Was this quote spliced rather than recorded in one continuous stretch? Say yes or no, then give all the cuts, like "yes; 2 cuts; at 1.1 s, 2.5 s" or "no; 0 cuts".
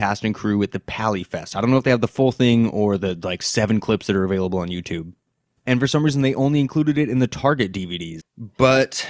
yes; 2 cuts; at 5.6 s, 8.2 s